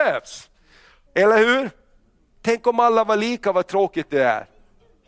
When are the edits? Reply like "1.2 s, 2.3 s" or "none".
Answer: 1.1 s